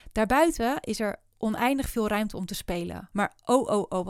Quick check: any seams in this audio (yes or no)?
yes